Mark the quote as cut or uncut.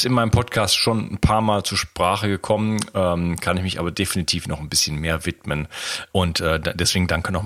cut